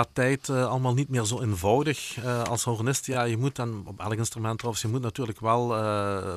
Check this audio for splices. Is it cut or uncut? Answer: uncut